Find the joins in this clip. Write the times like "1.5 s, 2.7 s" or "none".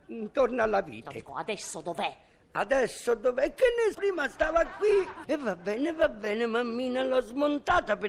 1.3 s, 3.9 s, 5.2 s